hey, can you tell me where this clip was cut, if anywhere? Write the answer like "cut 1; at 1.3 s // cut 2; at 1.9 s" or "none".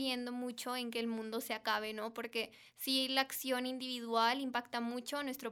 none